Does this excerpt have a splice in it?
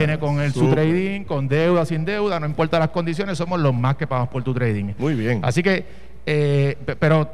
no; 0 cuts

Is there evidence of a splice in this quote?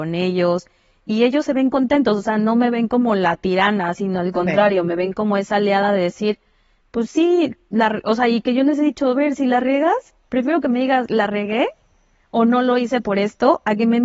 no; 0 cuts

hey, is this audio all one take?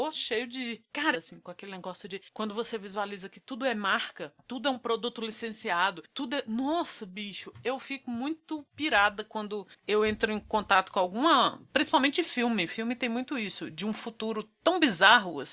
no; 1 cut; at 1.1 s

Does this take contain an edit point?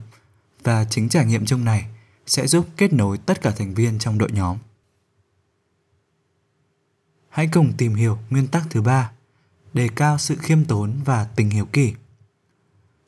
no; 0 cuts

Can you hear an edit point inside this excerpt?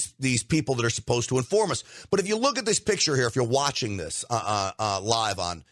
no; 0 cuts

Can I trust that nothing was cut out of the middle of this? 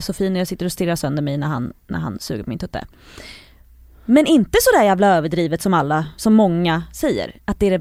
no; 1 cut; at 1.8 s

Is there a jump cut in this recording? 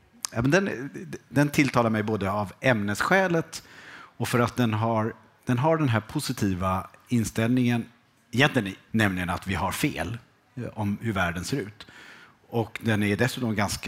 yes; 1 cut; at 8.9 s

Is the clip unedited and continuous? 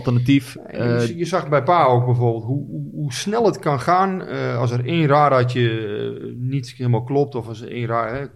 yes; 0 cuts

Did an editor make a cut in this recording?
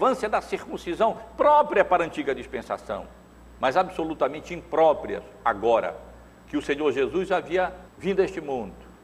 yes; 1 cut; at 7.9 s

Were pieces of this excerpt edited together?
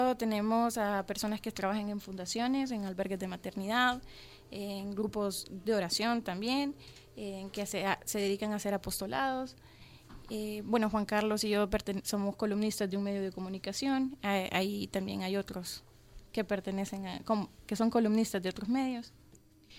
no; 0 cuts

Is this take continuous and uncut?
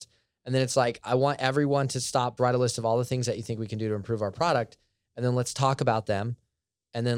no; 1 cut; at 2.4 s

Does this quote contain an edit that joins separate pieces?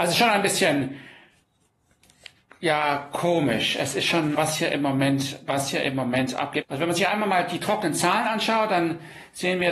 yes; 2 cuts; at 4.3 s, 6.6 s

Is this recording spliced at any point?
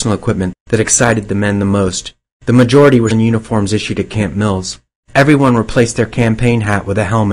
yes; 1 cut; at 3.1 s

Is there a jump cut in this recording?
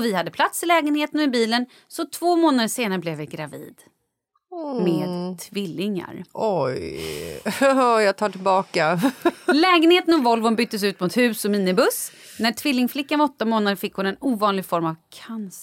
no; 0 cuts

